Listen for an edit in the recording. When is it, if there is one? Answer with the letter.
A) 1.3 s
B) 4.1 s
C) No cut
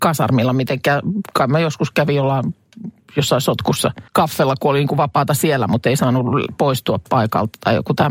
B